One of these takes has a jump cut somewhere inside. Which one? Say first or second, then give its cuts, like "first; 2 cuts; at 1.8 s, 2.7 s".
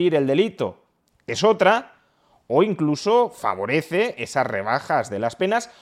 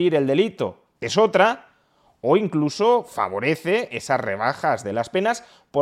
second; 1 cut; at 0.9 s